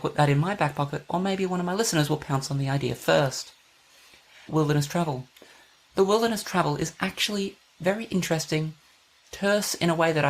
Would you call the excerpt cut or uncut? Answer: cut